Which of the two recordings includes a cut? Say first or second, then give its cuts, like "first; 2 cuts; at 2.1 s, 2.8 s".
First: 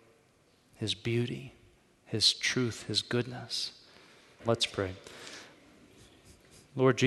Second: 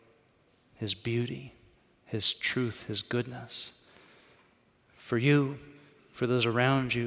first; 1 cut; at 4.4 s